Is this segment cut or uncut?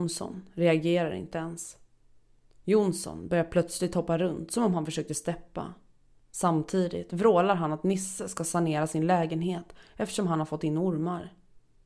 uncut